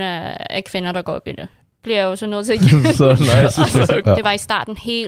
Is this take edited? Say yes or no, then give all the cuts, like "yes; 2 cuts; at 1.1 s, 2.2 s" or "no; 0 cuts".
yes; 2 cuts; at 1.6 s, 4.0 s